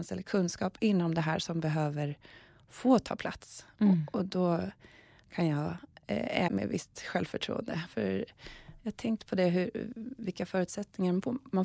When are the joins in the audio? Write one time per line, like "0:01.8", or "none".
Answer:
0:06.5
0:07.9